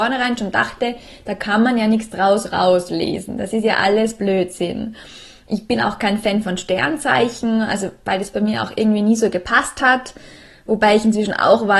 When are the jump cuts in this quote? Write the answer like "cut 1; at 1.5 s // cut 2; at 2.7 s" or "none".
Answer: none